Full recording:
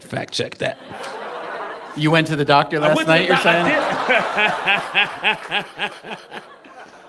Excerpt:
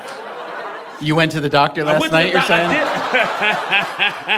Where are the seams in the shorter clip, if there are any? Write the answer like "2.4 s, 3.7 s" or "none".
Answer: none